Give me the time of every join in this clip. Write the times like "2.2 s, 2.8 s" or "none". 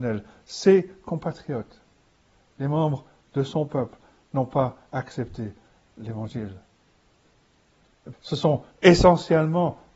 8.1 s